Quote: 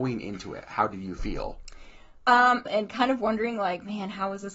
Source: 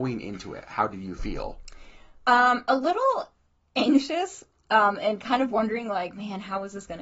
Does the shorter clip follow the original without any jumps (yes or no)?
no